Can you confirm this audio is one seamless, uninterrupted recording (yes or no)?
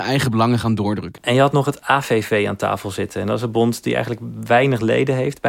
no